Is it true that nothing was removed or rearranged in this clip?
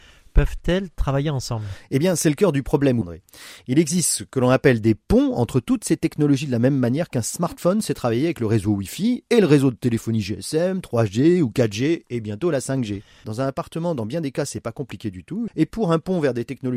no; 3 cuts; at 3.0 s, 13.2 s, 15.5 s

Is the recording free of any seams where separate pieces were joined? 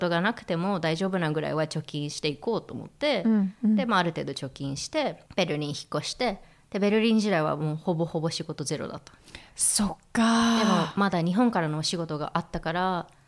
no; 1 cut; at 5.3 s

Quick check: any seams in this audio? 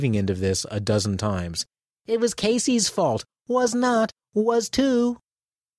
no; 0 cuts

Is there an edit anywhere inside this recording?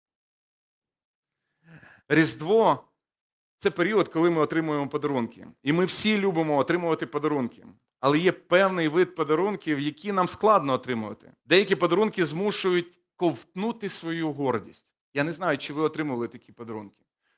yes; 2 cuts; at 2.0 s, 11.4 s

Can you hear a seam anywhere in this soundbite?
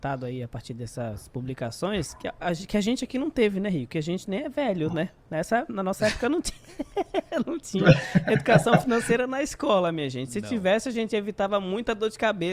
no; 0 cuts

